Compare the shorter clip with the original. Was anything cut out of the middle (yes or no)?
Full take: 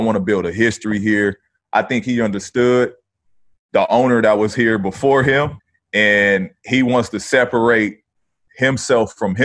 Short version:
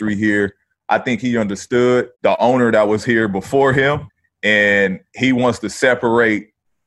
yes